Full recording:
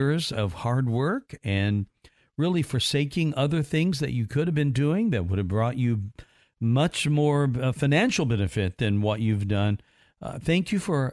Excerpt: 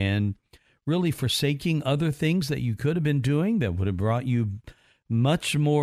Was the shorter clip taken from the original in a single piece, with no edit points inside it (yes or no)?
yes